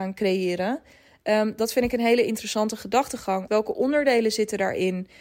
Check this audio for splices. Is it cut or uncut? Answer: cut